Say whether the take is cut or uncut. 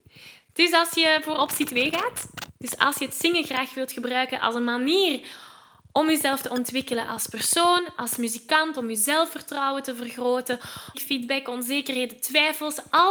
cut